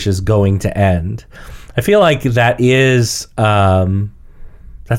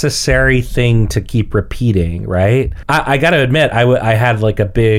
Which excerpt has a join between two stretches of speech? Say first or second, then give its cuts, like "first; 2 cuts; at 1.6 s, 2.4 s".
second; 1 cut; at 2.8 s